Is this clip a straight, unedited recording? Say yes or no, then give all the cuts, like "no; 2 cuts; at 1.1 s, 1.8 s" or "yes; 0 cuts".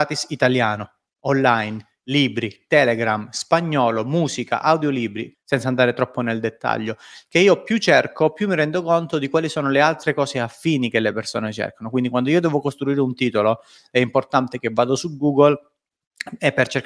no; 1 cut; at 5.3 s